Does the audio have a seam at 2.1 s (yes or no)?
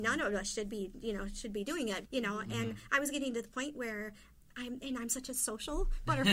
yes